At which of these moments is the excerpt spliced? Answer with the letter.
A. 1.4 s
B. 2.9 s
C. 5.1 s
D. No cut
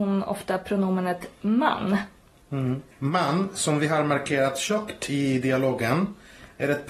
B